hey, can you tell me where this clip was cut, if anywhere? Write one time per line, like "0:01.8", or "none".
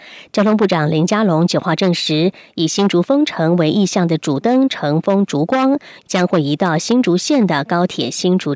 0:06.0